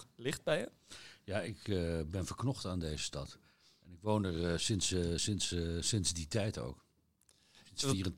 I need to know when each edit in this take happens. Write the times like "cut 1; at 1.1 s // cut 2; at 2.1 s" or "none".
none